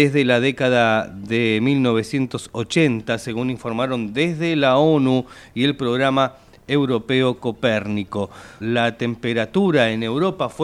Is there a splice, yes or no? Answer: yes